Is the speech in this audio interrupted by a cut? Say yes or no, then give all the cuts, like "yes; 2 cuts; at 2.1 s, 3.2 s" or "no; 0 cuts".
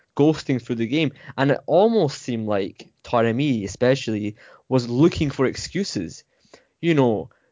no; 0 cuts